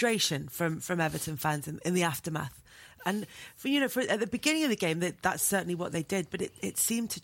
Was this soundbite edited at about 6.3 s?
no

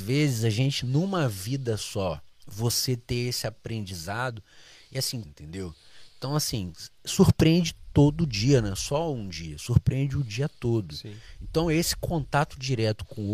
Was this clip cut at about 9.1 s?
no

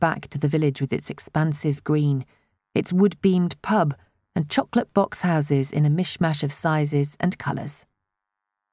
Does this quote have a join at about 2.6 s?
yes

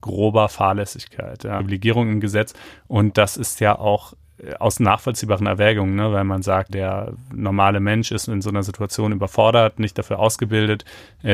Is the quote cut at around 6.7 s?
yes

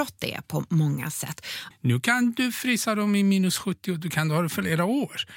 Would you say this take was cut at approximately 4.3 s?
no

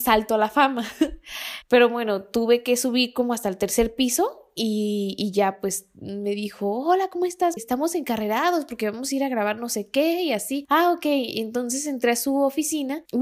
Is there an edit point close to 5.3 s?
no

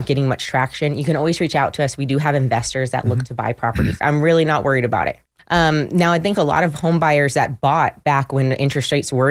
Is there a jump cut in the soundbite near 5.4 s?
yes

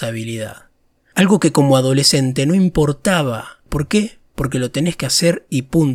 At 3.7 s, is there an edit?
yes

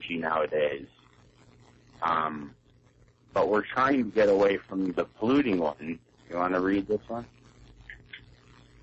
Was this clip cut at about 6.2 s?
yes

